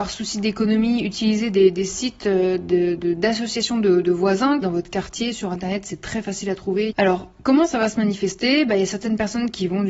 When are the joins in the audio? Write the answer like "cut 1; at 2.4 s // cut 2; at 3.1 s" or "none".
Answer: cut 1; at 4.6 s // cut 2; at 6.9 s